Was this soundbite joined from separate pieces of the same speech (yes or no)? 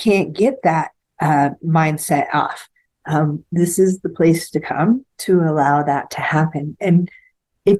yes